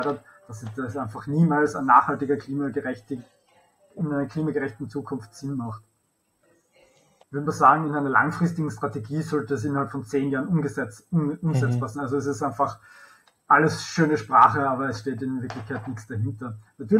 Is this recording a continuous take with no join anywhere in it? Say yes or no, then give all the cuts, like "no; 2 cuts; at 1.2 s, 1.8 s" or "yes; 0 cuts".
no; 2 cuts; at 7.2 s, 11.9 s